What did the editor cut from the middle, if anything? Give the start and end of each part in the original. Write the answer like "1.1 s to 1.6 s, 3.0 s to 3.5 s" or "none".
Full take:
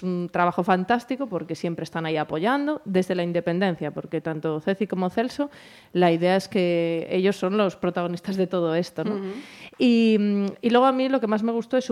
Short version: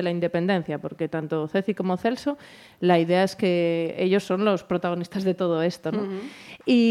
none